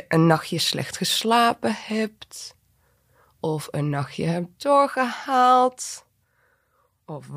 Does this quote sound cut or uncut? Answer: uncut